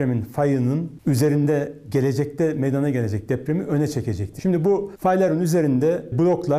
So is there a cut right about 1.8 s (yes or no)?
no